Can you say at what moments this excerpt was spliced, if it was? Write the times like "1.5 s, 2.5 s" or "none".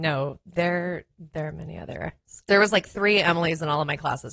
2.5 s